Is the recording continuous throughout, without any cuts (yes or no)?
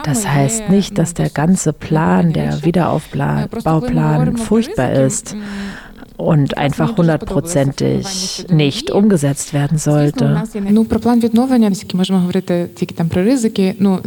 no